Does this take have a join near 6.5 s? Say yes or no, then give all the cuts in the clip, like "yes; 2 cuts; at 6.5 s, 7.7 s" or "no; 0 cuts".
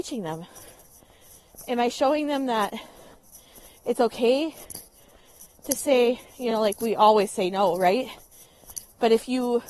no; 0 cuts